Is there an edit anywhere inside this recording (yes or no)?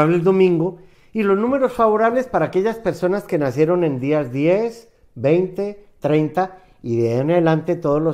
no